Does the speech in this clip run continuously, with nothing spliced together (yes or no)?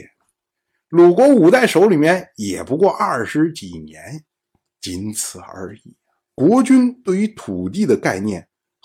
no